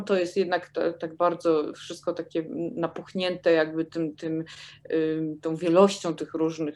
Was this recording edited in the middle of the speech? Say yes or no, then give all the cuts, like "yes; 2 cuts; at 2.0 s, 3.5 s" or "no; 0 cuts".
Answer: no; 0 cuts